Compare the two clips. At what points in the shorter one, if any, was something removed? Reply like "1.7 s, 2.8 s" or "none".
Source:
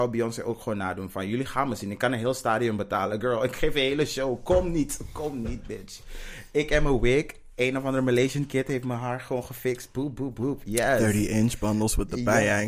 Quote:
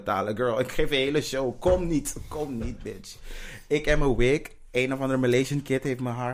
none